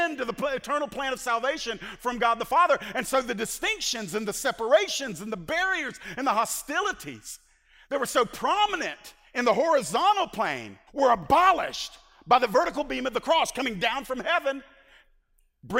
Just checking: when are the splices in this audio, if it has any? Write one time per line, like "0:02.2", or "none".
0:10.9